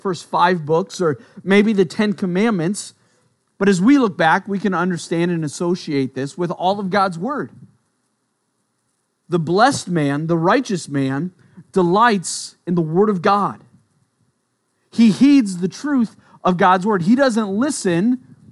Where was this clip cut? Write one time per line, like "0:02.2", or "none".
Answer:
none

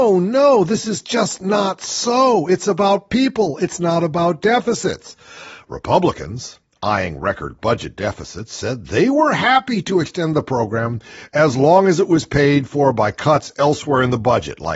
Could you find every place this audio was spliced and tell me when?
none

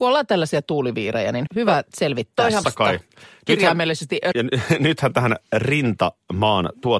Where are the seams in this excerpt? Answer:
0:01.5
0:02.6
0:04.3

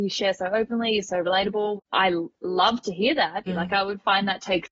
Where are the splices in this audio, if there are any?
0:01.8
0:03.5

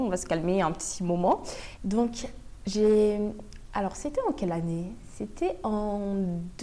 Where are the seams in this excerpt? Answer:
0:01.8

